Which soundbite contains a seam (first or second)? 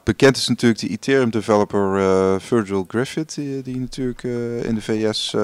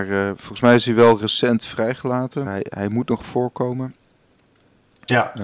second